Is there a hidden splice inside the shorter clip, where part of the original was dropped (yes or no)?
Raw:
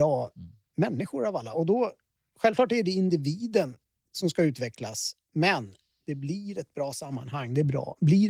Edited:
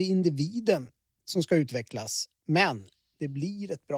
no